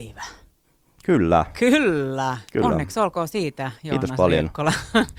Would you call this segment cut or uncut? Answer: cut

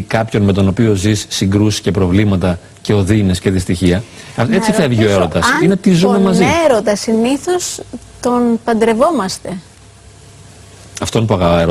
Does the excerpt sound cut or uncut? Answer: uncut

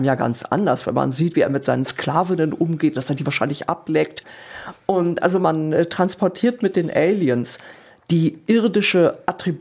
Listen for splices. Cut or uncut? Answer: uncut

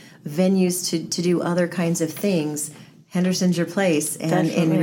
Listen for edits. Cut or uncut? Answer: uncut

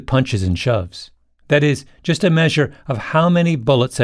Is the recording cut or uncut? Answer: cut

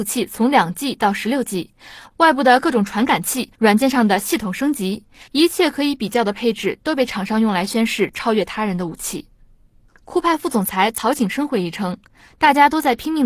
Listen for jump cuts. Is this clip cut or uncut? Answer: uncut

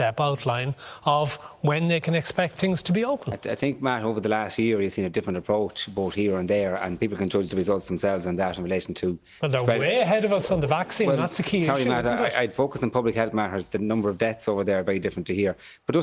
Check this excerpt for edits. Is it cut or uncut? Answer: uncut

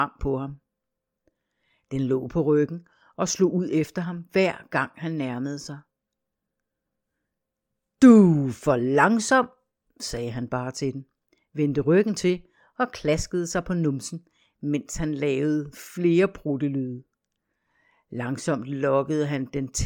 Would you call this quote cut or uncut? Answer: uncut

